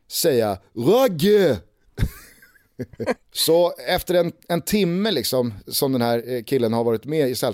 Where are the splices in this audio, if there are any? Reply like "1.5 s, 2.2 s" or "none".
3.2 s